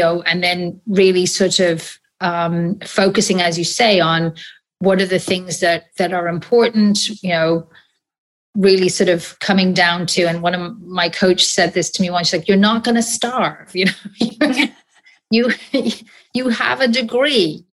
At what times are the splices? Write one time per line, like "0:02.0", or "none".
none

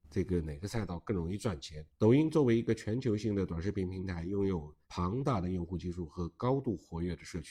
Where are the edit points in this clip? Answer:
0:01.9
0:04.8

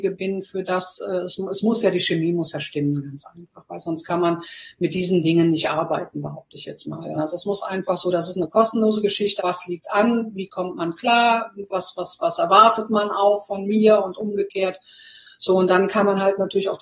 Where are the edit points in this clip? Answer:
0:07.2
0:09.4

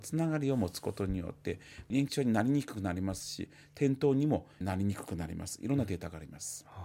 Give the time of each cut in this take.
0:04.6

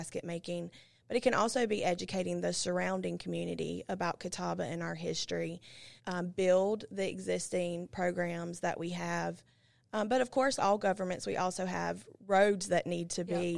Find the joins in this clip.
0:06.0
0:10.6

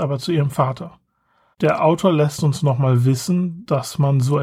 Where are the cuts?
0:01.5

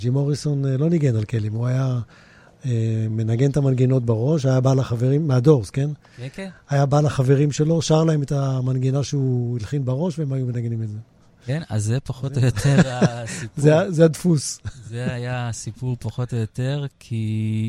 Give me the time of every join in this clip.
none

